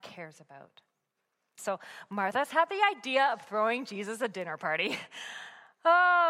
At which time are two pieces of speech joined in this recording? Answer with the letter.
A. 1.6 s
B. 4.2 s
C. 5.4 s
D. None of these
A